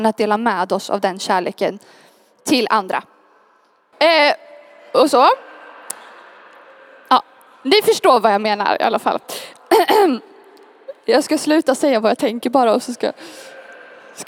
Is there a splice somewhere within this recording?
yes; 2 cuts; at 3.9 s, 9.2 s

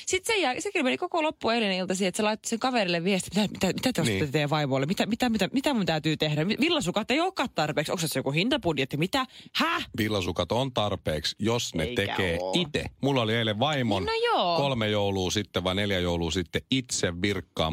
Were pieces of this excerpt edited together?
no; 0 cuts

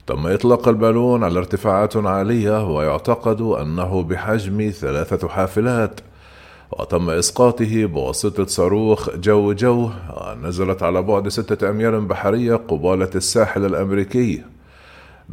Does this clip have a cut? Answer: no; 0 cuts

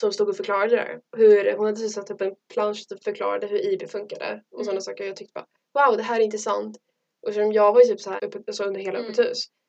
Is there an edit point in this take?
yes; 2 cuts; at 1.1 s, 8.2 s

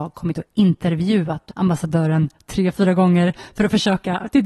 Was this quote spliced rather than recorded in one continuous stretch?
yes; 1 cut; at 1.5 s

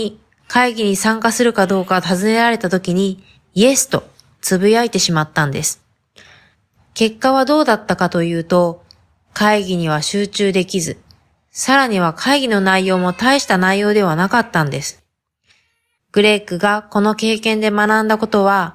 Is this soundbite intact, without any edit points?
no; 2 cuts; at 6.8 s, 16.0 s

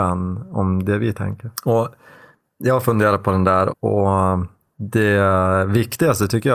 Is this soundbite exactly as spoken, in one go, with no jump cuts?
no; 2 cuts; at 1.5 s, 3.7 s

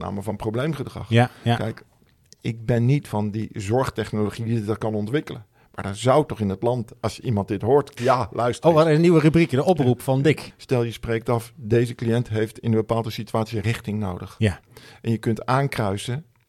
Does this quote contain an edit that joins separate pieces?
yes; 2 cuts; at 8.0 s, 10.5 s

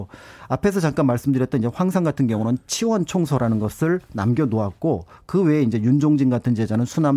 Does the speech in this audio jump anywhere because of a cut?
no; 0 cuts

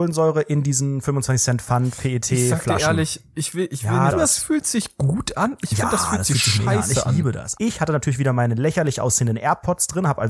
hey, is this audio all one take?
no; 2 cuts; at 4.1 s, 7.5 s

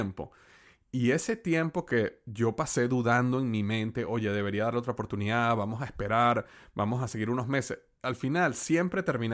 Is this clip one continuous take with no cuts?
yes; 0 cuts

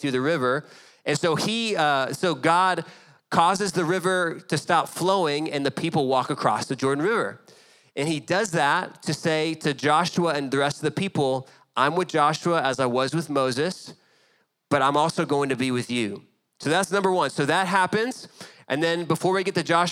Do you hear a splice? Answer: no; 0 cuts

